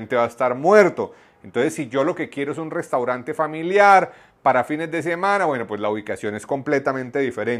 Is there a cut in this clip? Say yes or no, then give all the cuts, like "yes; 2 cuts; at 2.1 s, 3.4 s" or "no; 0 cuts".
no; 0 cuts